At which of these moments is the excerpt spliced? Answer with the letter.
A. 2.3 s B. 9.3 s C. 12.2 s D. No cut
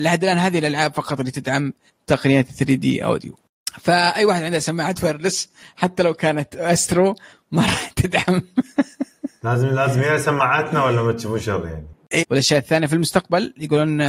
C